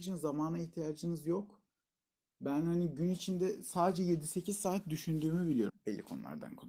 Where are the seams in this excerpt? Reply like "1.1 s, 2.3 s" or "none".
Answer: 5.7 s